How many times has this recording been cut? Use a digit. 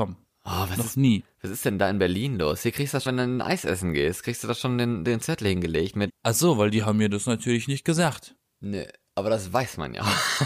2